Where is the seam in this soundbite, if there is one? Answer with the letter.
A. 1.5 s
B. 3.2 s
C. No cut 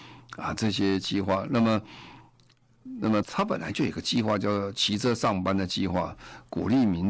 B